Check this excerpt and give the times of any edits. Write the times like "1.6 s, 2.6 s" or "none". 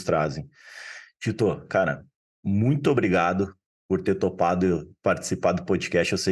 none